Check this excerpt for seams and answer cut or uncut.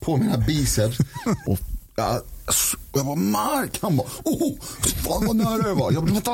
cut